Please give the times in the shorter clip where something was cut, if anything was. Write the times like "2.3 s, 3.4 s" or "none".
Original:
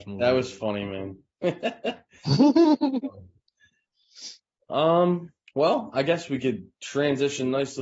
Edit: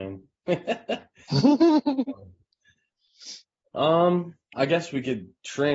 4.5 s